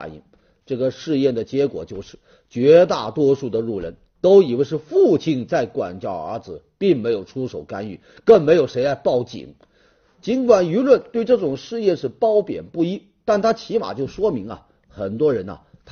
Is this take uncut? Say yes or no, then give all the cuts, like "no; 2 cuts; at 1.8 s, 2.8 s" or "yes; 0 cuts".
yes; 0 cuts